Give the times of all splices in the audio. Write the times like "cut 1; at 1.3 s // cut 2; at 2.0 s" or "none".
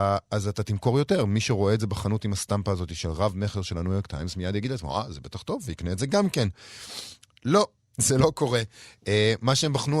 none